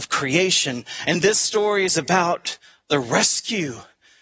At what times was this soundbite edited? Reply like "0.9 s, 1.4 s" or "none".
none